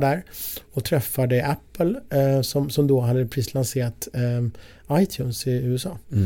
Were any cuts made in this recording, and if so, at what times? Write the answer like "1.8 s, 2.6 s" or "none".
none

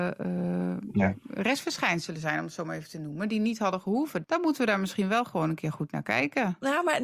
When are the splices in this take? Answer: 4.2 s

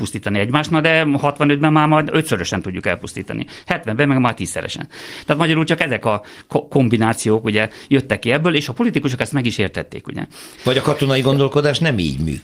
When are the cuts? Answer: 10.6 s

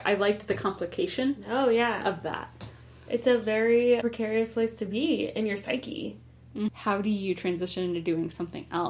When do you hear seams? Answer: 4.0 s, 6.7 s

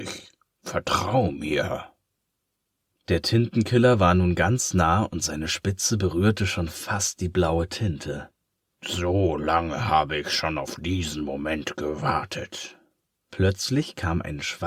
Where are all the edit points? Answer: none

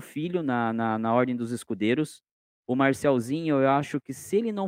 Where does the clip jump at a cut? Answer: none

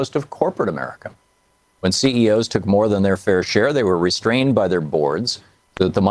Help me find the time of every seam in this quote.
none

